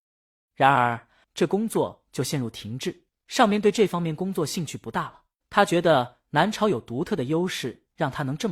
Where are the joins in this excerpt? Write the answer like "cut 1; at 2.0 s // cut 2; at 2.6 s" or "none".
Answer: cut 1; at 1.2 s // cut 2; at 5.4 s